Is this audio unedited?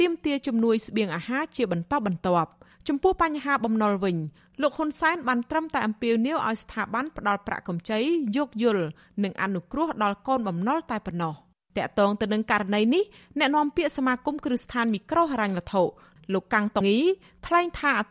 no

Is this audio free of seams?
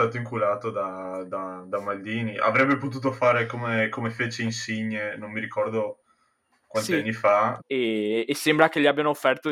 no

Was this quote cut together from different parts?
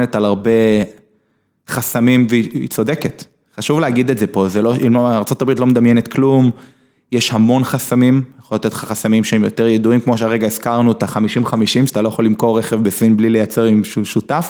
no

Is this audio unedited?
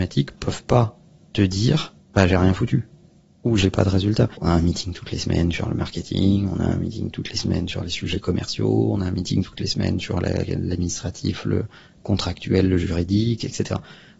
no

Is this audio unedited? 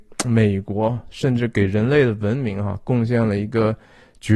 yes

